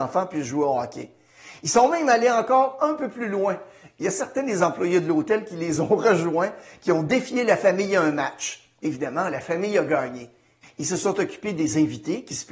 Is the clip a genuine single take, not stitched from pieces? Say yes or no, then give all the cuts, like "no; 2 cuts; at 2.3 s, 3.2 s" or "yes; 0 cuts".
no; 2 cuts; at 8.8 s, 10.6 s